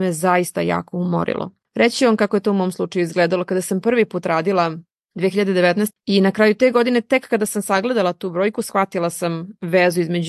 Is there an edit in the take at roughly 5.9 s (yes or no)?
yes